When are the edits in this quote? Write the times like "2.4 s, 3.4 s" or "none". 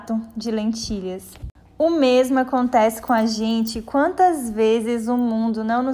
none